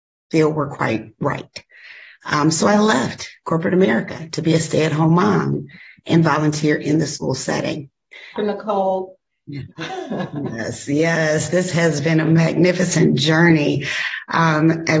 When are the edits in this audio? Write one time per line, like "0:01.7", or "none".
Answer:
0:08.4
0:09.7